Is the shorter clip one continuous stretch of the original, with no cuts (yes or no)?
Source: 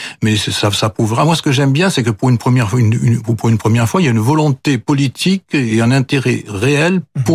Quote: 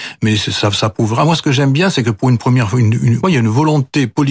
no